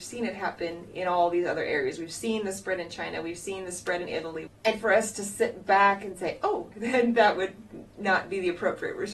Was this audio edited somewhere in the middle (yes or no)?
yes